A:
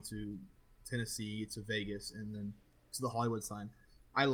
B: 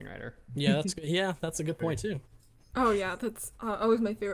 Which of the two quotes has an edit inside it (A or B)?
B